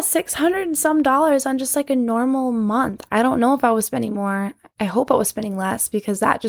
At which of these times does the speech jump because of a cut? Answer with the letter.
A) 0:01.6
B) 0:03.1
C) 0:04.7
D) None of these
B